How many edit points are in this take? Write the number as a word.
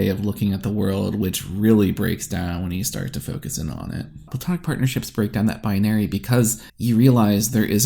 one